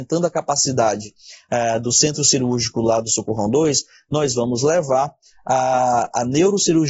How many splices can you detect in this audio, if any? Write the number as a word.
zero